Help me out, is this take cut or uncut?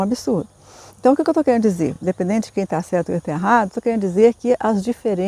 uncut